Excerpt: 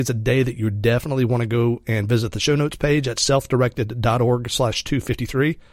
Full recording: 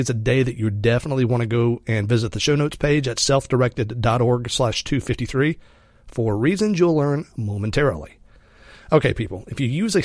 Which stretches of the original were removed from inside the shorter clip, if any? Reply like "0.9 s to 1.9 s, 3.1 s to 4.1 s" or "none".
none